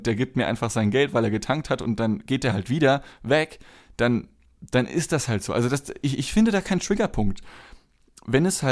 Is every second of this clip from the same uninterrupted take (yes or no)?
yes